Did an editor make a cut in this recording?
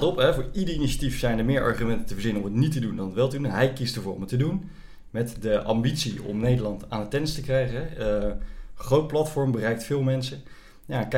no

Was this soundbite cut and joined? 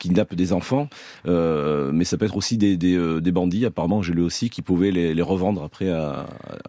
no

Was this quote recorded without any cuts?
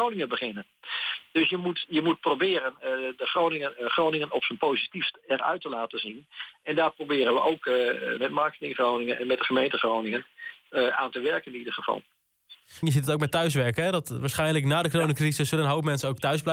no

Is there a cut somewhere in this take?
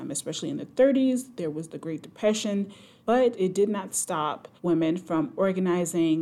yes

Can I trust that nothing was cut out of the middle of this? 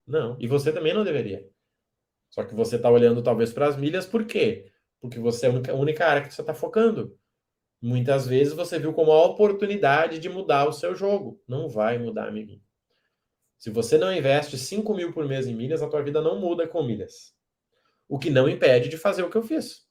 yes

